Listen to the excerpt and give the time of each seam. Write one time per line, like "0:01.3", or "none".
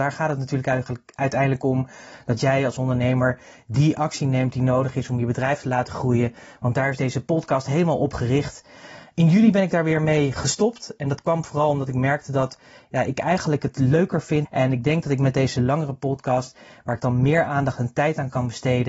0:14.5